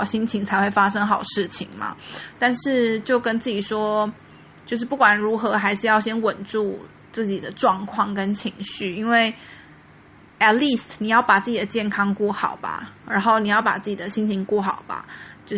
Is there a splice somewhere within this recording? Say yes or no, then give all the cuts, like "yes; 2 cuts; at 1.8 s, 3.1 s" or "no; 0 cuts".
yes; 1 cut; at 2.3 s